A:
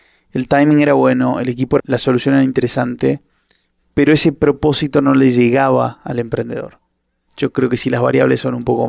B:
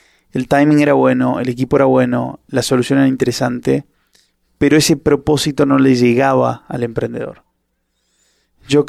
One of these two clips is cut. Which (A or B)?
A